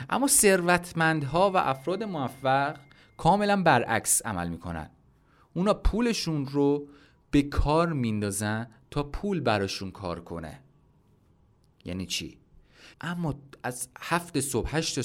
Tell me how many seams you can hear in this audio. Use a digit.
1